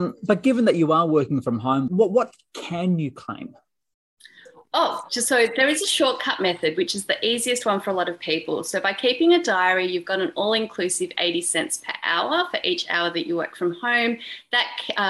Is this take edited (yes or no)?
yes